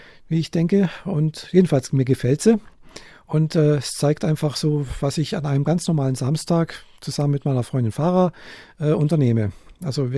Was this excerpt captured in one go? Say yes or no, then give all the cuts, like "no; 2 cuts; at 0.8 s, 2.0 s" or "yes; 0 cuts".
yes; 0 cuts